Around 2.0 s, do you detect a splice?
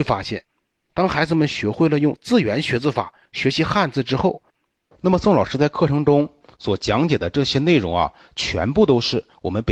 no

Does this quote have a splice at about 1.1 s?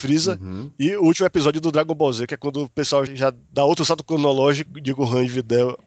no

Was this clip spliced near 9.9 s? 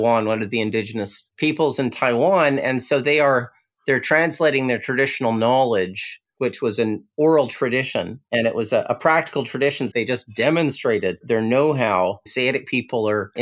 yes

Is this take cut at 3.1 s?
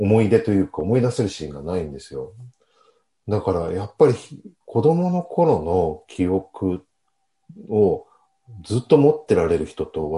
no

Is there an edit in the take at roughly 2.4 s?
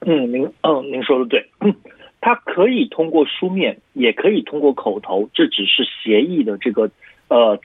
no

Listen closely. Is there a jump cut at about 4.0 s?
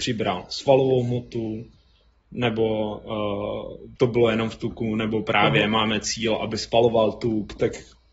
yes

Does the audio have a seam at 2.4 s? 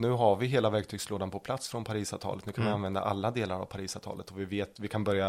no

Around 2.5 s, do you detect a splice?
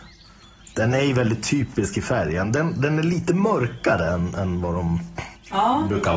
no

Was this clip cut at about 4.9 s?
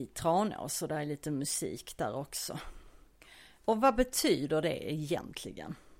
no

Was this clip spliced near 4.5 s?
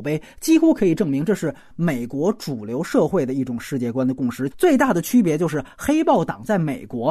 yes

